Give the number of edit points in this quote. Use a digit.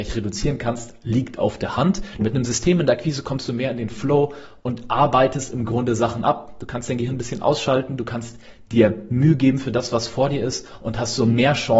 1